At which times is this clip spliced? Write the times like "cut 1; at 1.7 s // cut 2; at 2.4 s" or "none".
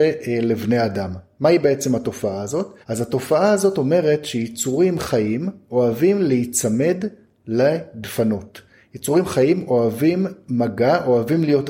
cut 1; at 2.8 s